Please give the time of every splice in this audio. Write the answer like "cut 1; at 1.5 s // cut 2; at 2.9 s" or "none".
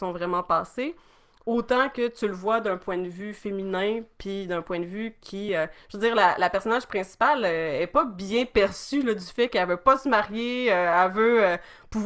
none